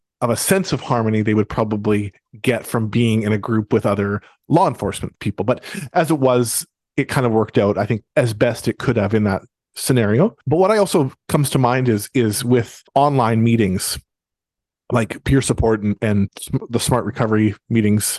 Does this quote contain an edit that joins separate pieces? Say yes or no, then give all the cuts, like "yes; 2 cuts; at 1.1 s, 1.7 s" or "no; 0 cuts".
no; 0 cuts